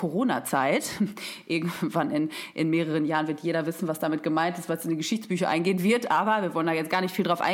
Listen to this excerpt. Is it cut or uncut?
uncut